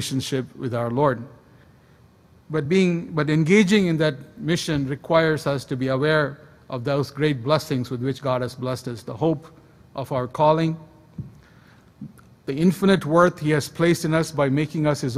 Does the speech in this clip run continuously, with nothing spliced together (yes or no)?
yes